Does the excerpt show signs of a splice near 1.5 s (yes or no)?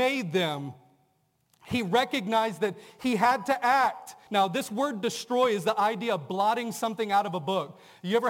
no